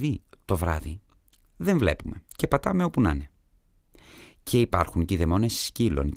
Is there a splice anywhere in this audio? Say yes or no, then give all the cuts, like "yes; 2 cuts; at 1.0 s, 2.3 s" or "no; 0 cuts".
yes; 1 cut; at 2.3 s